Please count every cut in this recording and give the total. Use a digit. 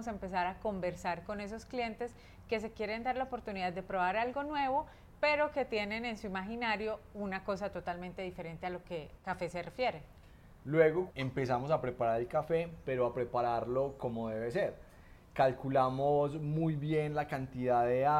1